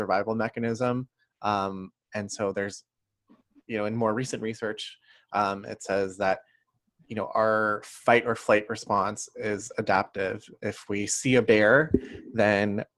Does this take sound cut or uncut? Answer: uncut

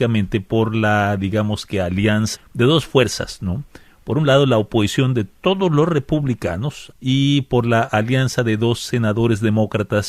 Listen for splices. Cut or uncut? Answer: cut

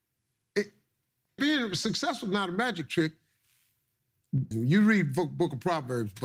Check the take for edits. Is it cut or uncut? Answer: cut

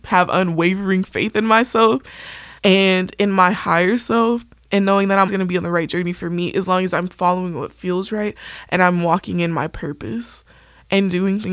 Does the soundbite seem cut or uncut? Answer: cut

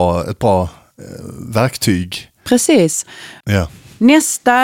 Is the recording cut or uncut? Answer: cut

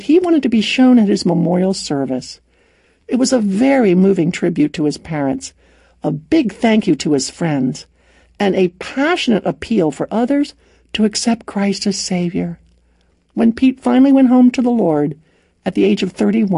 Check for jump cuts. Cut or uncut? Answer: uncut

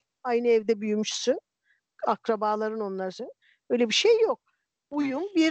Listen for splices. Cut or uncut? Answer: uncut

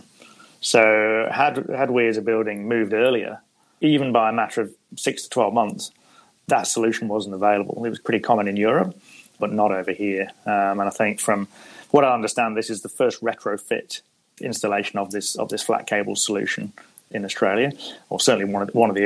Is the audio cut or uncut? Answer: uncut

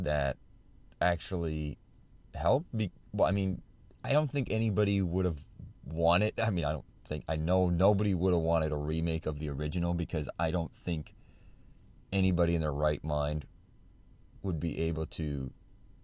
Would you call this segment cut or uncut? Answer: uncut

